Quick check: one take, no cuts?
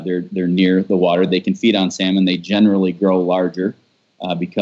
yes; 0 cuts

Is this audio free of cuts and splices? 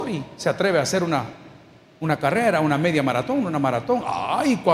yes; 0 cuts

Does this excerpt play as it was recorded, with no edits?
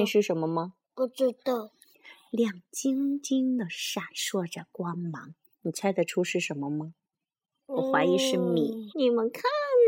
no; 2 cuts; at 1.9 s, 8.9 s

